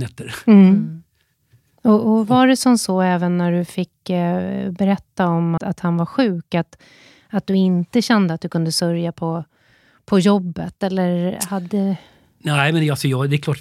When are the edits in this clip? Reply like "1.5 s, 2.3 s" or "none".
5.6 s